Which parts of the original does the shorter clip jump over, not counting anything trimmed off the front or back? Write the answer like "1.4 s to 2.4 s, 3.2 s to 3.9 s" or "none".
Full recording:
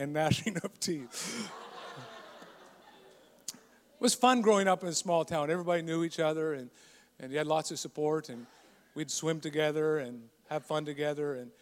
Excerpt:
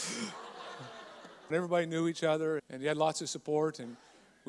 2.7 s to 5.5 s, 6.5 s to 7.1 s

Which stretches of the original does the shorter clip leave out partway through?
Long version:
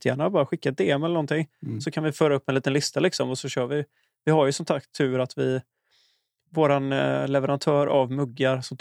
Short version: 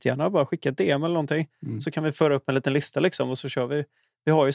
none

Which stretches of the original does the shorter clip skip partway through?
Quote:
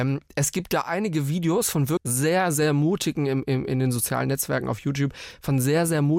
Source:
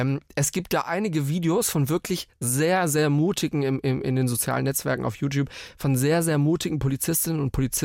2.0 s to 2.3 s

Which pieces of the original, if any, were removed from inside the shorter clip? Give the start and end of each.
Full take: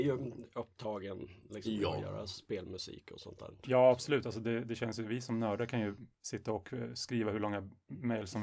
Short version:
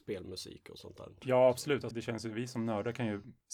4.3 s to 4.6 s

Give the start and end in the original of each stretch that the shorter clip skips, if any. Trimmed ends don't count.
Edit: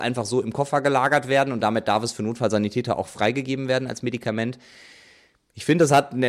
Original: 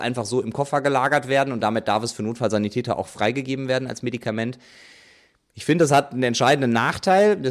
none

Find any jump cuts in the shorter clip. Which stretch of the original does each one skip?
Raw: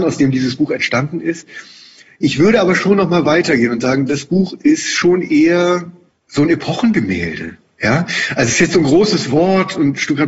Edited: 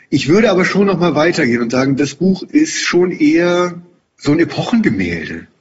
none

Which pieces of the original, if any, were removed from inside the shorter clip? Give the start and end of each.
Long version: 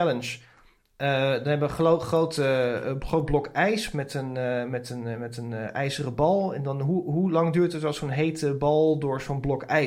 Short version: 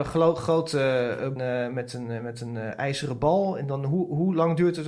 3.0 s to 4.3 s

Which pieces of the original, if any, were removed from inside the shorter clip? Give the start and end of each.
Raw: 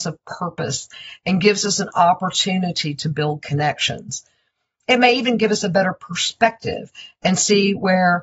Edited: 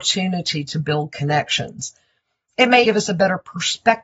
5.1 s to 5.4 s

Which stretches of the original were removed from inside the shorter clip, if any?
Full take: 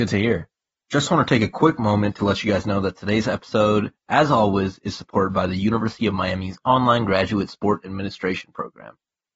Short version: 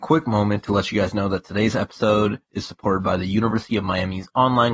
4.0 s to 4.8 s

